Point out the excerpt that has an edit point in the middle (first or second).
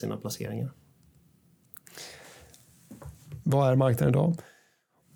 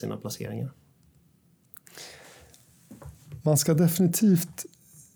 first